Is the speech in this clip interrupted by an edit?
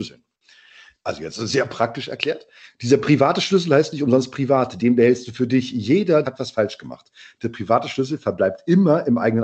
yes; 3 cuts; at 0.9 s, 2.7 s, 6.2 s

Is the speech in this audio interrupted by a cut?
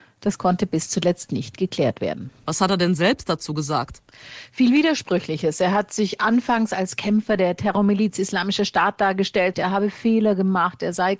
yes; 1 cut; at 9.5 s

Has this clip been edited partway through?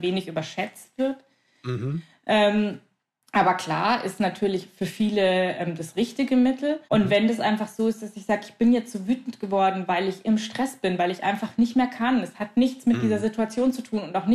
yes; 1 cut; at 6.8 s

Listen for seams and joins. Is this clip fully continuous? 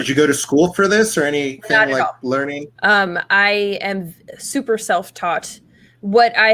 no; 1 cut; at 2.8 s

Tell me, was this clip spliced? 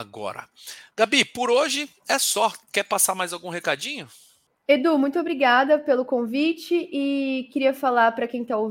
no; 0 cuts

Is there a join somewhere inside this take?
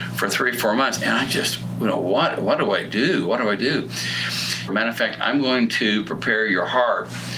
yes; 2 cuts; at 1.0 s, 4.7 s

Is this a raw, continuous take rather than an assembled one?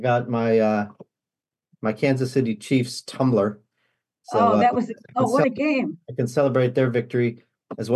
yes; 0 cuts

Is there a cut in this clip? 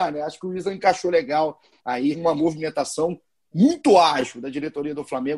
yes; 1 cut; at 2.1 s

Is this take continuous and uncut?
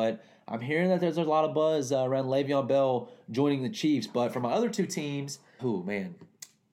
no; 1 cut; at 5.6 s

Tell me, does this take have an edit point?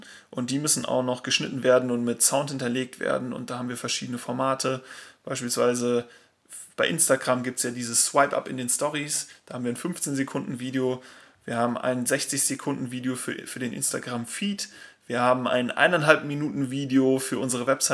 no; 0 cuts

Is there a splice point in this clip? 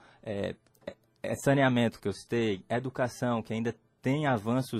no; 0 cuts

